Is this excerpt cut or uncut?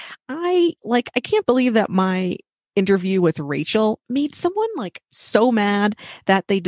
uncut